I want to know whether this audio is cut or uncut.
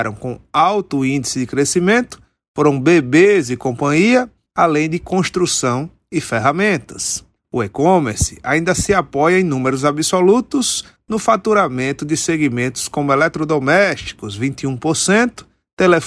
cut